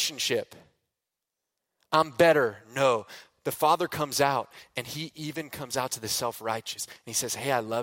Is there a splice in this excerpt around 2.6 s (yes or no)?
no